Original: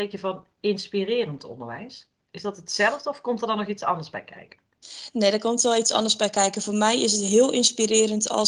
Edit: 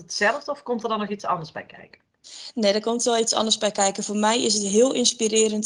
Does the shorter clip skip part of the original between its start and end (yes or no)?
no